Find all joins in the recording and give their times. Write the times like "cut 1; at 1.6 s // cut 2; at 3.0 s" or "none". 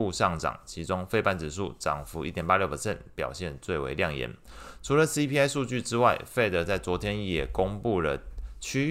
none